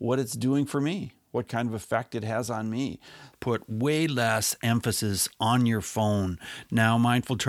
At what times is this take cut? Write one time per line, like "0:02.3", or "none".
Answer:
0:03.3